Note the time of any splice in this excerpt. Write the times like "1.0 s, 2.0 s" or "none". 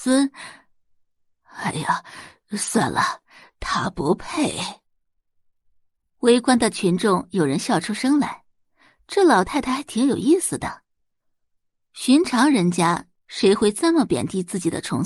none